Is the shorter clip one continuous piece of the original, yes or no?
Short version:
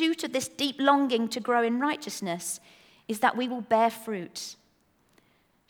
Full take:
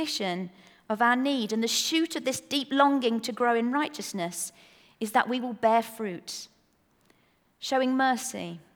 yes